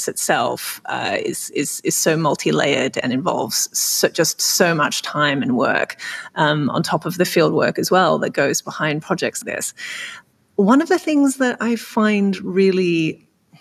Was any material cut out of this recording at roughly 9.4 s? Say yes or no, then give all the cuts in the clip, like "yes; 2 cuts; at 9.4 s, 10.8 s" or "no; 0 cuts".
yes; 1 cut; at 9.4 s